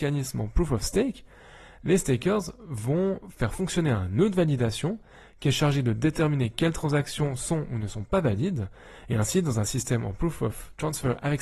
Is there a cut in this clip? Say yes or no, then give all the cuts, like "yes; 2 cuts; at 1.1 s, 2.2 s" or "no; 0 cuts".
no; 0 cuts